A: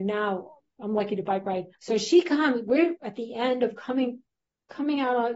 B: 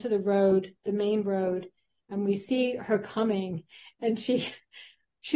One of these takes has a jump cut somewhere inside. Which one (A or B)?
A